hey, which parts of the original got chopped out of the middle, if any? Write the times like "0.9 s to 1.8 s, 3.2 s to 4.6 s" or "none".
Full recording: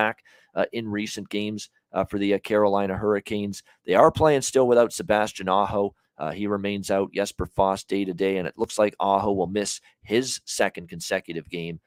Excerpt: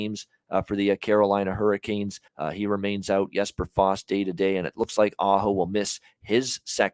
3.7 s to 6.1 s